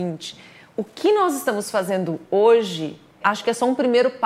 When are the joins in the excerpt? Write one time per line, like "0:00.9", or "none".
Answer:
0:03.2